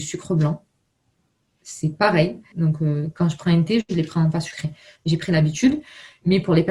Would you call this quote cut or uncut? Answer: cut